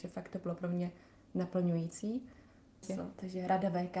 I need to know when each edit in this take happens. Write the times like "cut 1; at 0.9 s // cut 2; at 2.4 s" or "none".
cut 1; at 2.8 s